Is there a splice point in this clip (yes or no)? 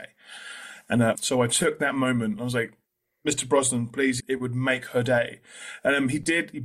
yes